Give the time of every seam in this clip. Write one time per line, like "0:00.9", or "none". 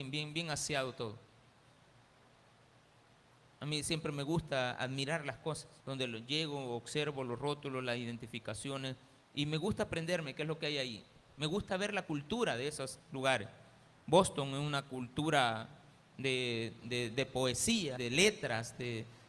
0:05.8
0:18.0